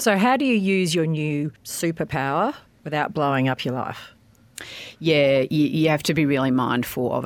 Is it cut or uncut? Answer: cut